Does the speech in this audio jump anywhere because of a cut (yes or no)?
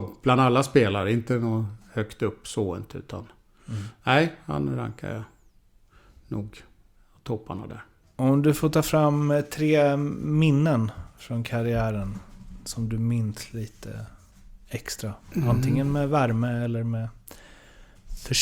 no